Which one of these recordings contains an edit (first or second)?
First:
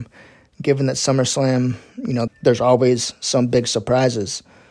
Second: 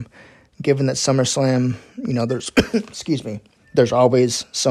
first